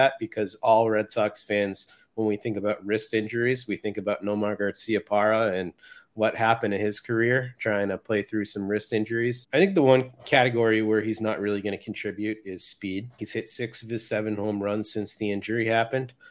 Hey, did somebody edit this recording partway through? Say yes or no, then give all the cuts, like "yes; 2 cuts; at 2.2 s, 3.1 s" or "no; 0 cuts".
yes; 2 cuts; at 9.4 s, 13.2 s